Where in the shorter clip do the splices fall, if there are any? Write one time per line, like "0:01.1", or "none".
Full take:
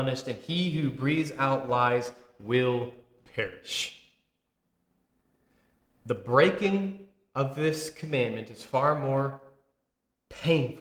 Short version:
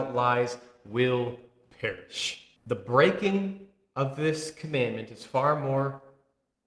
0:02.6